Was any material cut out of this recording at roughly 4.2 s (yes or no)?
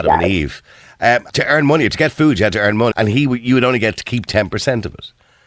no